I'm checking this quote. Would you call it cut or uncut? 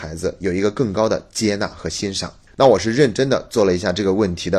uncut